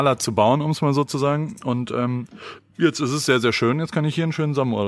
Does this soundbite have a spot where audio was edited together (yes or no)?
no